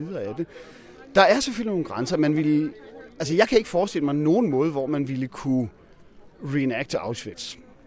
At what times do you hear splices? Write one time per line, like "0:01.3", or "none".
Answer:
none